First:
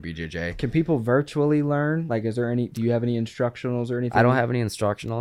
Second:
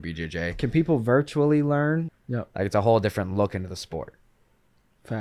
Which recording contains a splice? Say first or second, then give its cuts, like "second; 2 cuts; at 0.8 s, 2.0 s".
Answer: second; 1 cut; at 2.1 s